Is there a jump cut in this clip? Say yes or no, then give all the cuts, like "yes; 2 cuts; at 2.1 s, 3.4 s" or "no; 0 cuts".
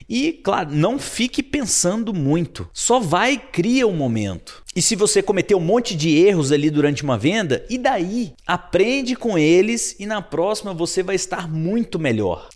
no; 0 cuts